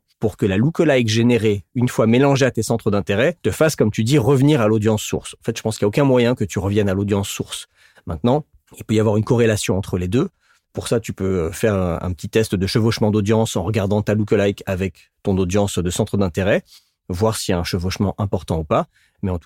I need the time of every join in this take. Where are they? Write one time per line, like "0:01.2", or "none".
0:03.4